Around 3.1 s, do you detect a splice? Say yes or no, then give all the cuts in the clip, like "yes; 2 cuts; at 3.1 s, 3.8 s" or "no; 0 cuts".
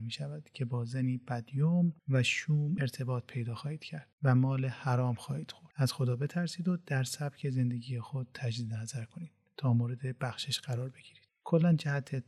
no; 0 cuts